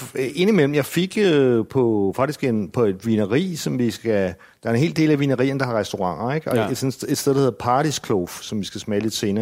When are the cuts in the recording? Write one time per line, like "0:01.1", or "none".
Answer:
none